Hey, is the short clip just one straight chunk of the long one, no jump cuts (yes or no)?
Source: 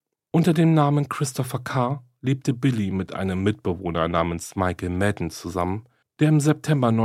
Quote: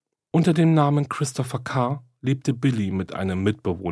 yes